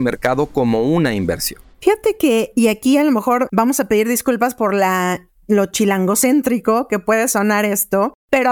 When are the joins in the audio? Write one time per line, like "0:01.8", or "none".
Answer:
0:01.7

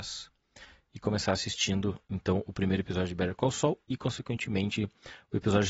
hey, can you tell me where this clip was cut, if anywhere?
none

